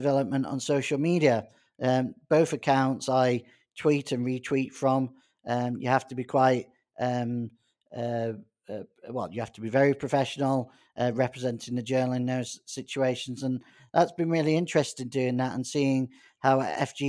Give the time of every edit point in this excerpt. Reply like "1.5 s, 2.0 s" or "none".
none

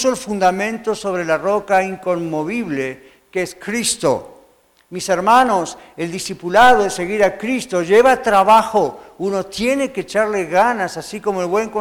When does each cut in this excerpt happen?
none

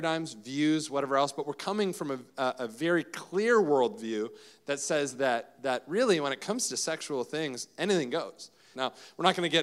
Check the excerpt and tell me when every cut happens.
8.7 s

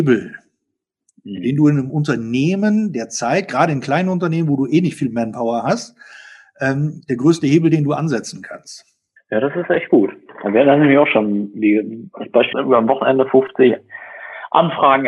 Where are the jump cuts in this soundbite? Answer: 9.2 s, 12.5 s

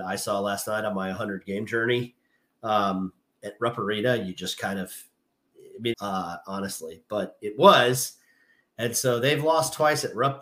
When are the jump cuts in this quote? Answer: 5.9 s

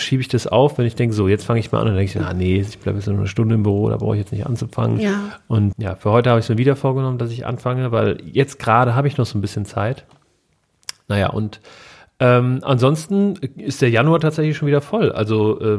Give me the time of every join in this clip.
5.7 s

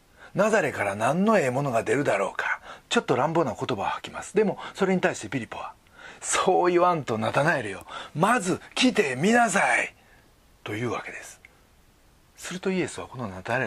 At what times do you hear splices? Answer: none

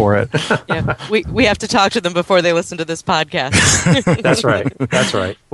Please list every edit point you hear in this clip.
none

